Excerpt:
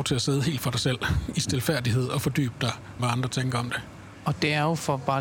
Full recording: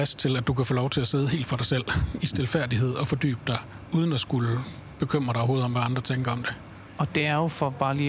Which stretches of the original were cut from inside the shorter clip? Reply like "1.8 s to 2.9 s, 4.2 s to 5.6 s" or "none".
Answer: 3.8 s to 5.7 s